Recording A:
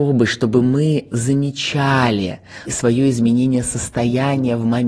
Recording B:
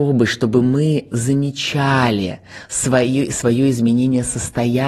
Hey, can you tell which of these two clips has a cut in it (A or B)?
A